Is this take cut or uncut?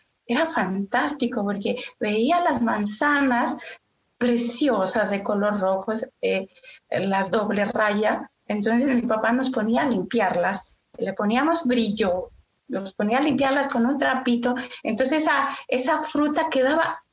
uncut